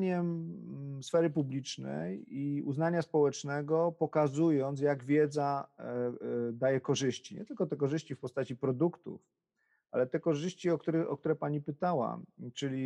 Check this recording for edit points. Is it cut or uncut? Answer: uncut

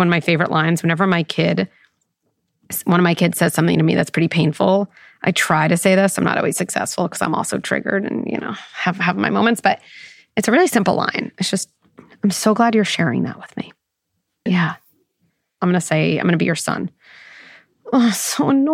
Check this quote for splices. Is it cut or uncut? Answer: cut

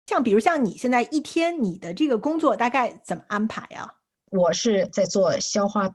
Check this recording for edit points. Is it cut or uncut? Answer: uncut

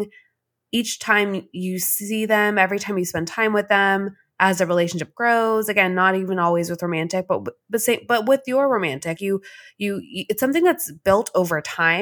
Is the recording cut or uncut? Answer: cut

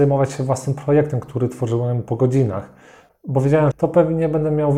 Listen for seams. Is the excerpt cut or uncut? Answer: cut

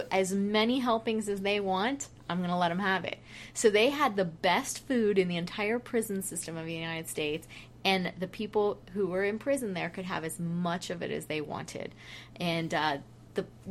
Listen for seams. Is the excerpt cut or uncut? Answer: uncut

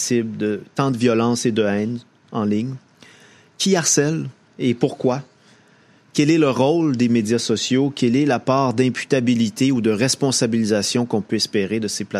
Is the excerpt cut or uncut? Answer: uncut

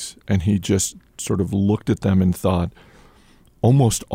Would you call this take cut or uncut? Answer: uncut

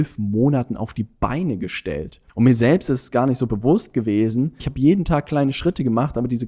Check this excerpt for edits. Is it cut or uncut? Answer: cut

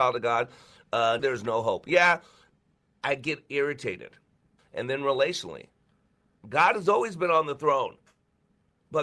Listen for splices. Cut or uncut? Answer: cut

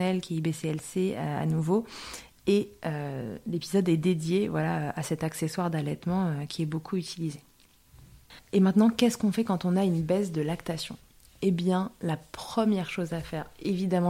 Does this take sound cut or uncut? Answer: uncut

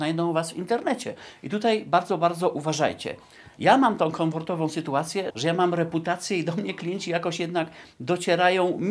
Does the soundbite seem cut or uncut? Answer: cut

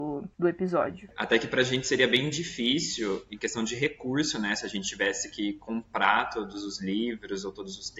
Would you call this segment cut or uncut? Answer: uncut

